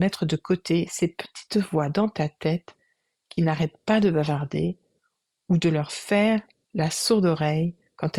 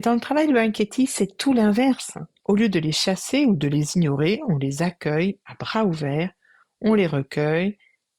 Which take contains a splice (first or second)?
second